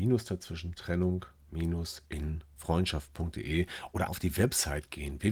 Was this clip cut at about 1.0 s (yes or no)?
no